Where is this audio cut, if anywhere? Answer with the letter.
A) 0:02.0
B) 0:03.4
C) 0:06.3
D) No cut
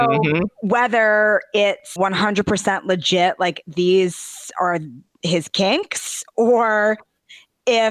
A